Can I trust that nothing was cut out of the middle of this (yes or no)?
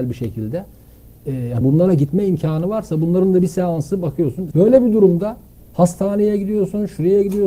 no